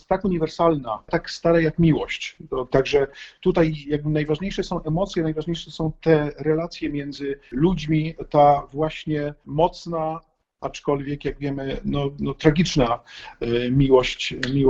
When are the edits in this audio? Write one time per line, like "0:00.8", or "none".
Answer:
0:02.7